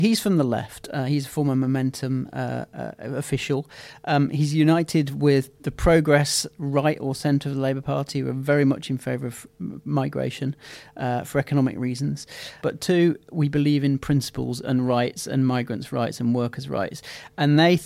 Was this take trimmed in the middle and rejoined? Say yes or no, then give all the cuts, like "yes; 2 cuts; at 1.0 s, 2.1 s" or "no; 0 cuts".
yes; 1 cut; at 12.6 s